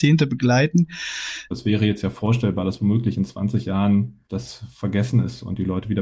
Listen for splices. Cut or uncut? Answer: cut